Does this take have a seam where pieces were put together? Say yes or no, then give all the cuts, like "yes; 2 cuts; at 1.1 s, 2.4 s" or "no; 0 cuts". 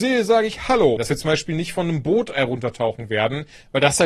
yes; 1 cut; at 1.0 s